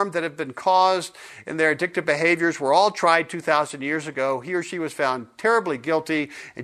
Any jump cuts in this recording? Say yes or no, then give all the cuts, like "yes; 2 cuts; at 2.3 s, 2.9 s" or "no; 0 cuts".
no; 0 cuts